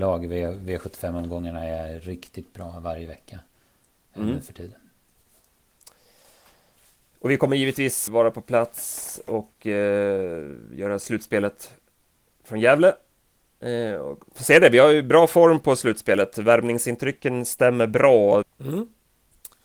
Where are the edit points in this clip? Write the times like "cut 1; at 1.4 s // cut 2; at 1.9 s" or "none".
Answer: cut 1; at 8.1 s // cut 2; at 18.4 s